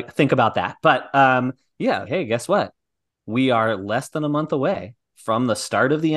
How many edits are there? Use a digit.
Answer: 1